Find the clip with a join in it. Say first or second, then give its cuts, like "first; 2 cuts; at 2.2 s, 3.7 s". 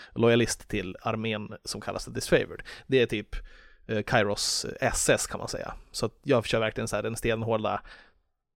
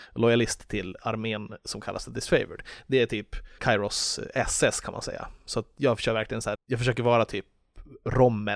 second; 2 cuts; at 3.6 s, 6.6 s